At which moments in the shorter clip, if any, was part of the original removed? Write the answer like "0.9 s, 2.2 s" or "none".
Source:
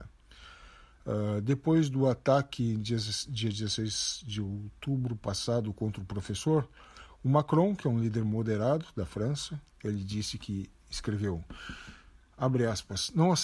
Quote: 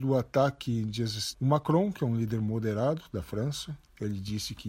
1.3 s